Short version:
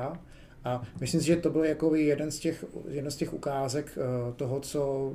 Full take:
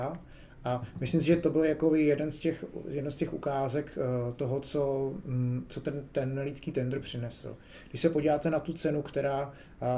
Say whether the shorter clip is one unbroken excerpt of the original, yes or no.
yes